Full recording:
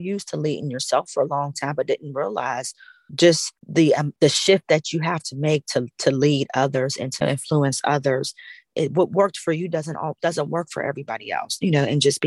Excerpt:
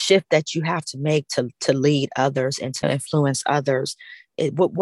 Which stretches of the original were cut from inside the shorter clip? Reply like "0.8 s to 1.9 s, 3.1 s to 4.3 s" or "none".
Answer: none